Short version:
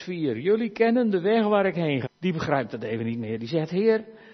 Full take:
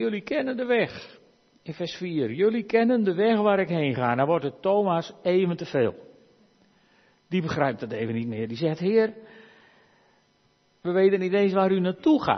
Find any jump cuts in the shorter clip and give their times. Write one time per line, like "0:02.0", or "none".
0:02.1